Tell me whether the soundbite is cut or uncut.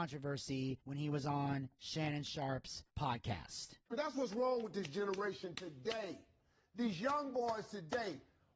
uncut